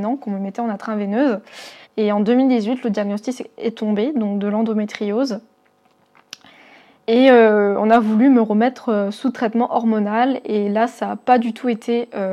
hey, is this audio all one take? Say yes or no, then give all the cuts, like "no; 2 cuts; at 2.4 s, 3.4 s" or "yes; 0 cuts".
no; 1 cut; at 1.8 s